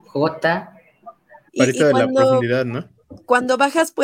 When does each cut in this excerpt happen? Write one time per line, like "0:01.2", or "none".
0:01.5